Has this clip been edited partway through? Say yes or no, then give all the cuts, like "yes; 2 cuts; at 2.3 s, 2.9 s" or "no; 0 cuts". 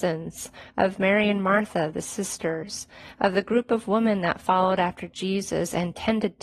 no; 0 cuts